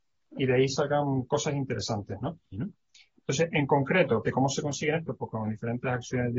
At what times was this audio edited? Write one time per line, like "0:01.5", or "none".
0:02.5
0:04.2